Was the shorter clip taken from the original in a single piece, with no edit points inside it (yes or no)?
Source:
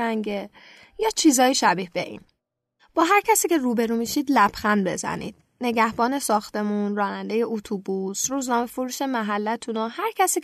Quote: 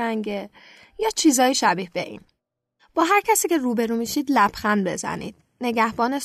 yes